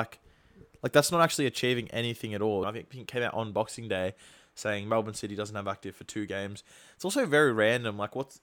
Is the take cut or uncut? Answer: cut